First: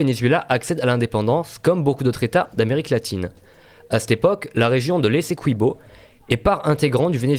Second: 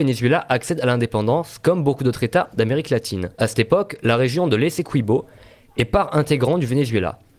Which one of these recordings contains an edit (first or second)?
second